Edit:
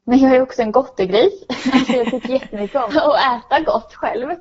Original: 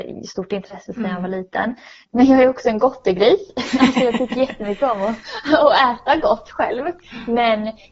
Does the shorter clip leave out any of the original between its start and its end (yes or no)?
yes